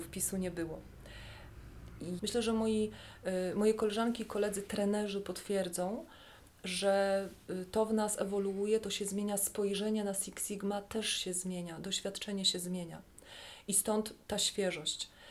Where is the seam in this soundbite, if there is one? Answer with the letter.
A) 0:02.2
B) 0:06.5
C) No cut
A